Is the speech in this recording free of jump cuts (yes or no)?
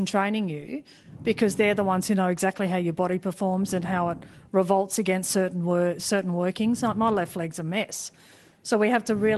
yes